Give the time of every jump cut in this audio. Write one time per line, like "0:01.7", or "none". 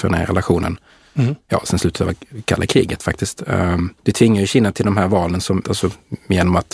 0:04.0
0:05.6